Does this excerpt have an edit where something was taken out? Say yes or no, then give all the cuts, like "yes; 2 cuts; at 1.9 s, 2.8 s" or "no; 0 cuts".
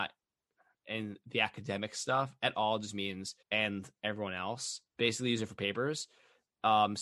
yes; 2 cuts; at 3.4 s, 4.9 s